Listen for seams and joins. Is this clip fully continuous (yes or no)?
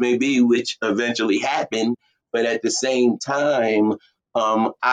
yes